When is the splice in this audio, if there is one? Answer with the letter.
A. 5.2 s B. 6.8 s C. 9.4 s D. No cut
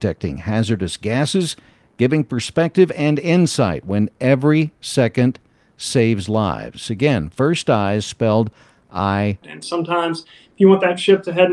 C